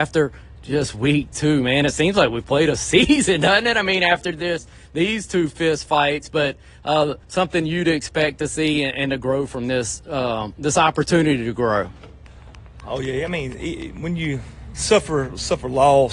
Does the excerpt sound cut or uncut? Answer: cut